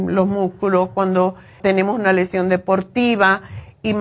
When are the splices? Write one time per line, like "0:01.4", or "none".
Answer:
0:01.6